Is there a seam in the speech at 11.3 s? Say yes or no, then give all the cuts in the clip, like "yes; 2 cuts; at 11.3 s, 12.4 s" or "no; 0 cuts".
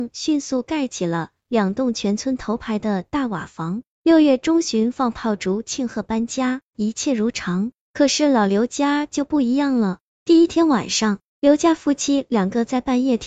no; 1 cut; at 6.7 s